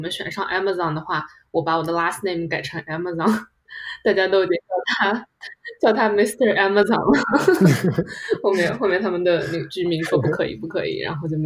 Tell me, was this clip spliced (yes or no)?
no